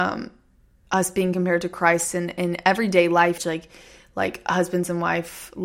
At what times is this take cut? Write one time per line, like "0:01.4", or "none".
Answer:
0:03.4